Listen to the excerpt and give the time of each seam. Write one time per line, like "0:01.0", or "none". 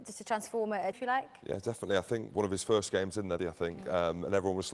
0:00.9
0:03.4

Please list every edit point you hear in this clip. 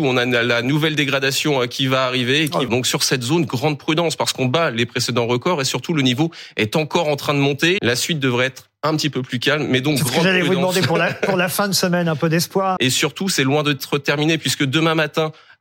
0:02.7
0:07.8
0:12.8

